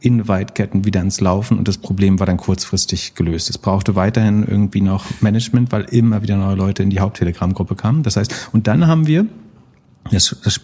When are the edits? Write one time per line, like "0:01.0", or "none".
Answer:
none